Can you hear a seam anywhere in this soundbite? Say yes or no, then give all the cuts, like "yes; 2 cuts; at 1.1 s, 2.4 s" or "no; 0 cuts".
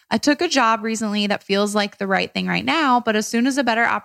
no; 0 cuts